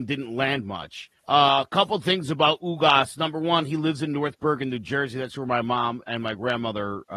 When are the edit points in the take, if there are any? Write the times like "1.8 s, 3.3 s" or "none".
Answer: 1.2 s, 6.0 s